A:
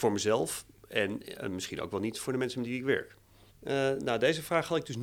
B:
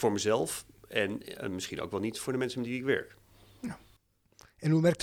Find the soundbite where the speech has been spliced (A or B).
A